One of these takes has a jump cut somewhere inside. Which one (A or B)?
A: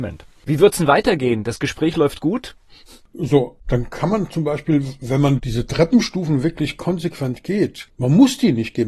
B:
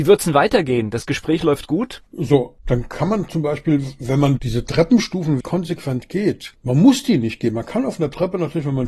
B